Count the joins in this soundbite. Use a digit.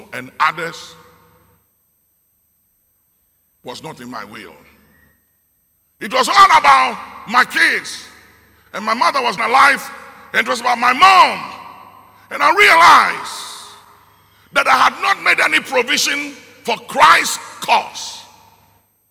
1